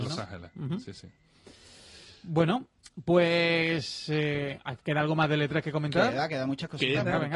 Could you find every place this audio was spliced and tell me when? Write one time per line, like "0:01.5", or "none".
none